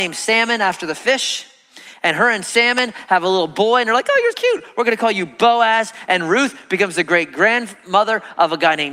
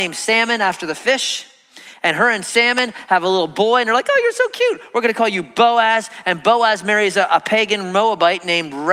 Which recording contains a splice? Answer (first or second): first